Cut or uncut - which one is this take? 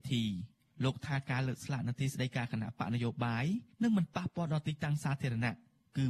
cut